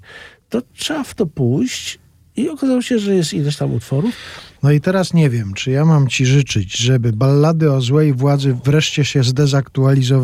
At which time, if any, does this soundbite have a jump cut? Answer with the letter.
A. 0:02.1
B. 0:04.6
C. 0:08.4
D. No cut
B